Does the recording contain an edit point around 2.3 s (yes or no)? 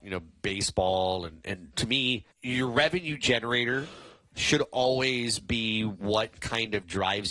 yes